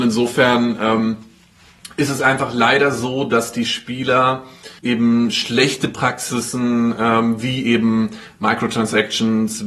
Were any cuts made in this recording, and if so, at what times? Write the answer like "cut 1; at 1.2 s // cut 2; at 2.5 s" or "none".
cut 1; at 4.8 s

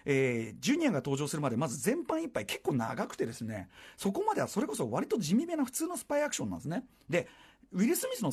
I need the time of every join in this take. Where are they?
none

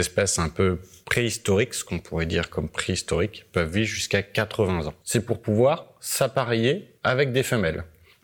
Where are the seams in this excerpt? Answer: cut 1; at 5.0 s

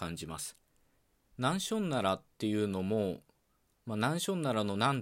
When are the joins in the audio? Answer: cut 1; at 1.3 s

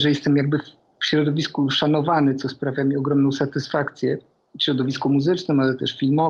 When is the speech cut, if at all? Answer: none

